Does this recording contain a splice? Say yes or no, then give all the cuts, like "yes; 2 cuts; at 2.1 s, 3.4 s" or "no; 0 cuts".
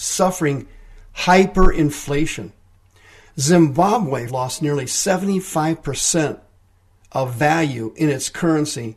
yes; 1 cut; at 4.3 s